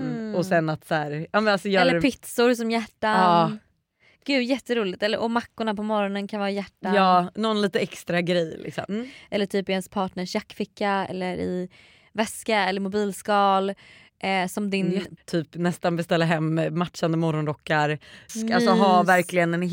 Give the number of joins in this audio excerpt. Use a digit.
3